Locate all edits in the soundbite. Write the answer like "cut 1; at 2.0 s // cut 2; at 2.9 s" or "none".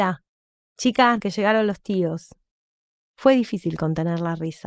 cut 1; at 1.2 s // cut 2; at 3.0 s